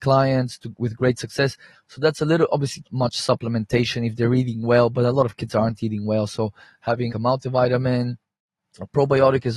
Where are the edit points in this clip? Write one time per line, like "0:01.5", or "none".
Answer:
0:01.7
0:02.8
0:07.1